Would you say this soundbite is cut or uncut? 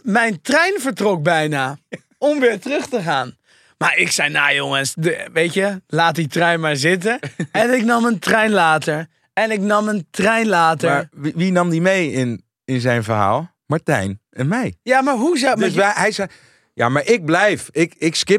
uncut